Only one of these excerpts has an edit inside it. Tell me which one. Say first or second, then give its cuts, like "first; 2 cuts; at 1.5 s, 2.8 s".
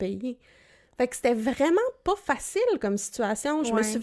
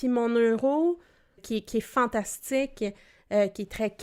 second; 1 cut; at 1.4 s